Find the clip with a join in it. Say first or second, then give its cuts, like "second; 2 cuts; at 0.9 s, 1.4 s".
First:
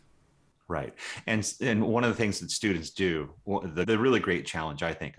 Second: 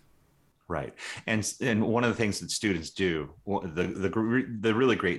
first; 1 cut; at 3.8 s